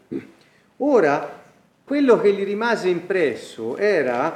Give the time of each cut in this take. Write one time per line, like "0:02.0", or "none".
0:01.9